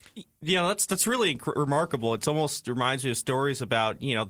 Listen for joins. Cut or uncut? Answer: uncut